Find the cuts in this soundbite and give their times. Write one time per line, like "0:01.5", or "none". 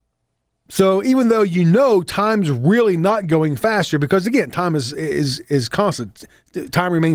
none

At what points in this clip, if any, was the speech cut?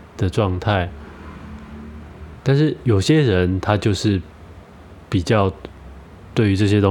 0:02.4

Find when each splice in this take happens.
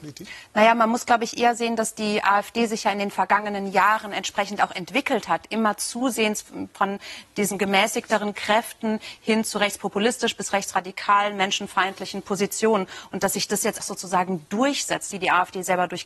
0:13.8
0:15.1

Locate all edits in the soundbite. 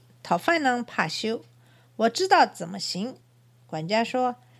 0:03.2

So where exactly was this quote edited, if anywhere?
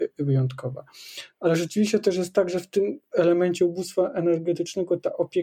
none

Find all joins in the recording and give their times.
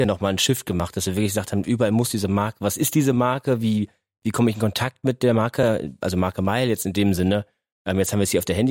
none

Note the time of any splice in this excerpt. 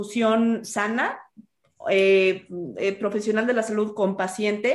none

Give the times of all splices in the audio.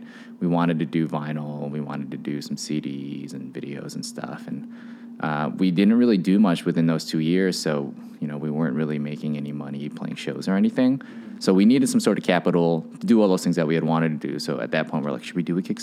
none

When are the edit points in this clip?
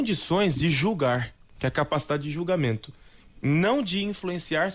none

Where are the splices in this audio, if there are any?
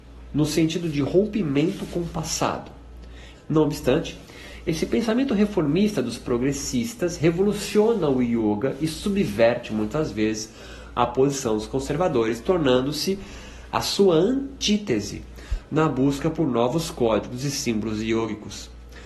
0:03.3

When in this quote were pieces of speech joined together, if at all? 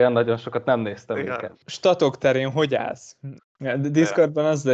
0:01.5
0:03.4

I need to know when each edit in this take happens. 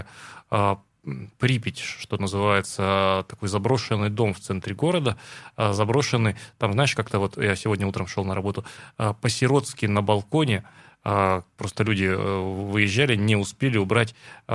none

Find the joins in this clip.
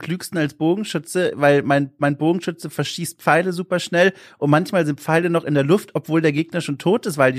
none

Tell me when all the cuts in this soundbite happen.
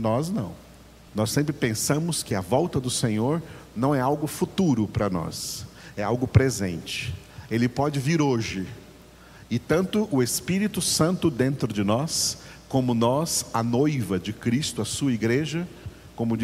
0:01.1

